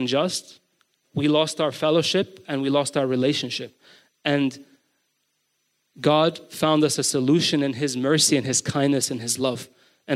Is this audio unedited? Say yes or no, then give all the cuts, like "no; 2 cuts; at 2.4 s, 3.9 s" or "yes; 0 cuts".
no; 1 cut; at 1.0 s